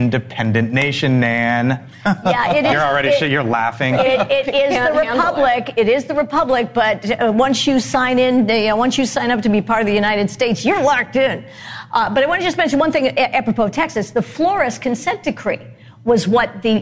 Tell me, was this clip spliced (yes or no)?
no